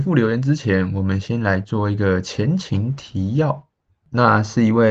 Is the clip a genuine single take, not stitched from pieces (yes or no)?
yes